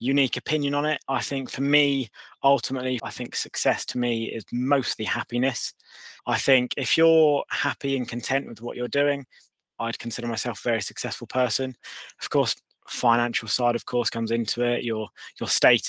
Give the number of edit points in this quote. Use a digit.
2